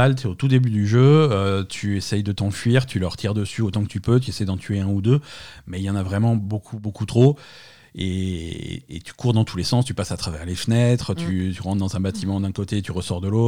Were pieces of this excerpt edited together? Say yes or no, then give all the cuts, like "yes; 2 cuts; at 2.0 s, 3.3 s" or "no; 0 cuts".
no; 0 cuts